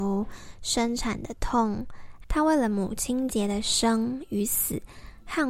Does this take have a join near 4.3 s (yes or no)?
no